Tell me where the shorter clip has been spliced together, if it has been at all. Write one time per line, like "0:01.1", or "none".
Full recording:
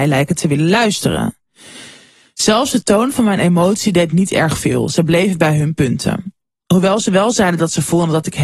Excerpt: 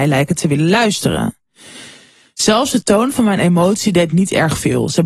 none